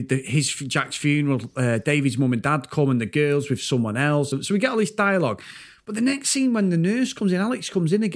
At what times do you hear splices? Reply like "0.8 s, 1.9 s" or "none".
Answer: none